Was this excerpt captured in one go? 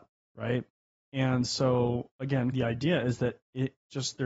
no; 2 cuts; at 1.0 s, 2.5 s

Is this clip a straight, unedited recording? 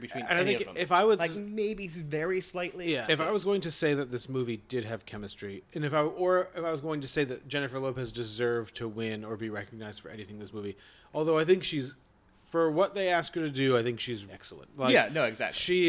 no; 2 cuts; at 3.1 s, 14.3 s

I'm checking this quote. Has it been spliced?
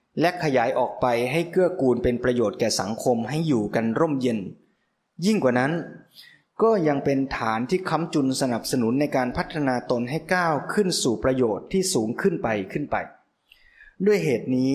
no; 0 cuts

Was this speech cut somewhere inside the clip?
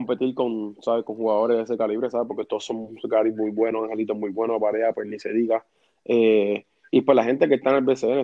no; 0 cuts

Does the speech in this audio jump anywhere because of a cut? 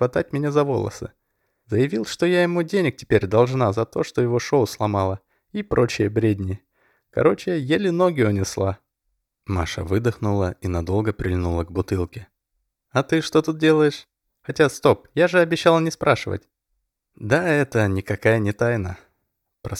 no; 0 cuts

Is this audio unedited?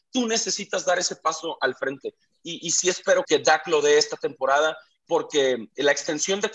no; 1 cut; at 3.2 s

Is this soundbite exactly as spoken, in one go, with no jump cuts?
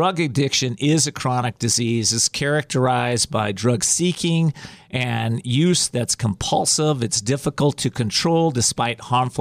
yes; 0 cuts

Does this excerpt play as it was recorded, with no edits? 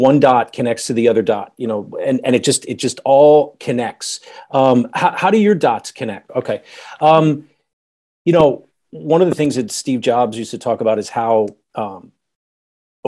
no; 1 cut; at 6.3 s

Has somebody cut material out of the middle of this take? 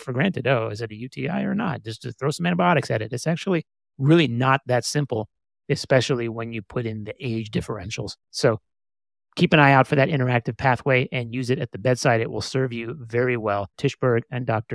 yes; 1 cut; at 13.7 s

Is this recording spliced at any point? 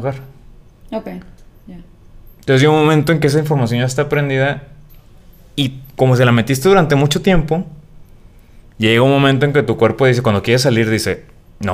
no; 0 cuts

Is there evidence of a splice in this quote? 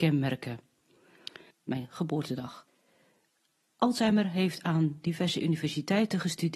yes; 1 cut; at 1.5 s

